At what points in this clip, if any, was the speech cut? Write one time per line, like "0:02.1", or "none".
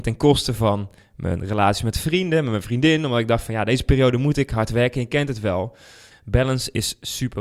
0:06.1